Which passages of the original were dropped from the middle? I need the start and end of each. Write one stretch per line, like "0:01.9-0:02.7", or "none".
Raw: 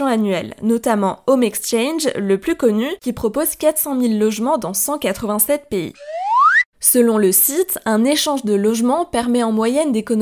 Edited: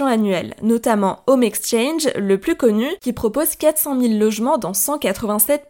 none